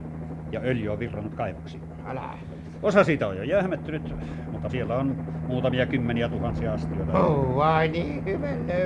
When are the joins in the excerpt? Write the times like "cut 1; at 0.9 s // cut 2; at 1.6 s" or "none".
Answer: cut 1; at 4.7 s